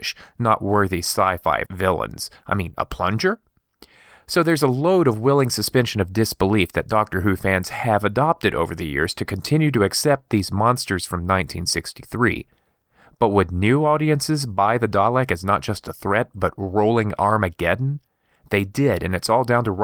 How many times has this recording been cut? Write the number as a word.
zero